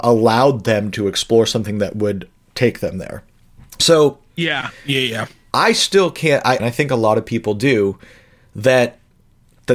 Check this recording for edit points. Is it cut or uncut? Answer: cut